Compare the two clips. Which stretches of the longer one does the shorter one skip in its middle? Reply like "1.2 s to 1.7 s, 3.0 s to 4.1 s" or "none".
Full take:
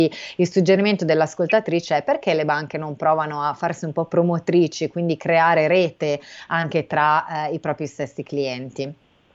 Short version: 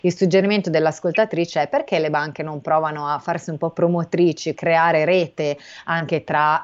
4.9 s to 5.2 s